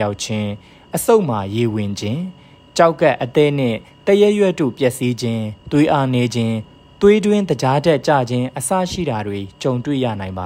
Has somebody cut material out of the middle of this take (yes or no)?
no